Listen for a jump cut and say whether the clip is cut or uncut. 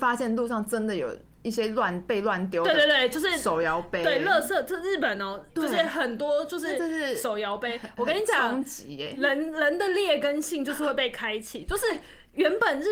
cut